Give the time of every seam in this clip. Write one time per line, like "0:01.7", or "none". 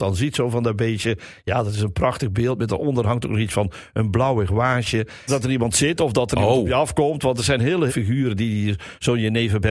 0:05.3
0:07.9